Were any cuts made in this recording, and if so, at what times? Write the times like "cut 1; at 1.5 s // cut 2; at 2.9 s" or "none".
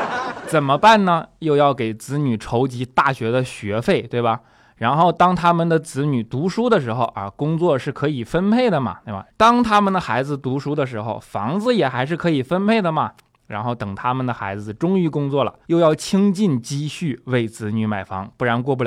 cut 1; at 9.3 s // cut 2; at 15.6 s